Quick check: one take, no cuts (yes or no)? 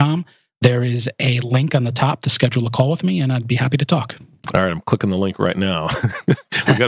yes